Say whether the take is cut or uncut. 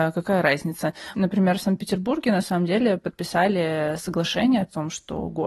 cut